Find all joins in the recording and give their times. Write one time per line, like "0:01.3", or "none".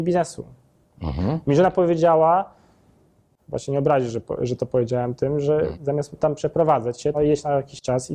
0:05.7
0:07.1